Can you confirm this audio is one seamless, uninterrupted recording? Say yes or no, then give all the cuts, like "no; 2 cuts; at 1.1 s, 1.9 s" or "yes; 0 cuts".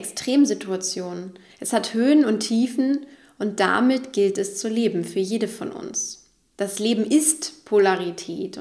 no; 1 cut; at 1.5 s